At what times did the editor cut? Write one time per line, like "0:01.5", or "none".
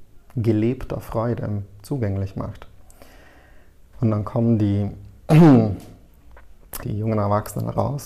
0:03.9
0:06.8